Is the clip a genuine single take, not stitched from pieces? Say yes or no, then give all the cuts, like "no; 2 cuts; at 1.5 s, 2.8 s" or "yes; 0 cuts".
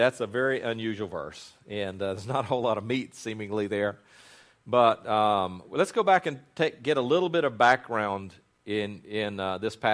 yes; 0 cuts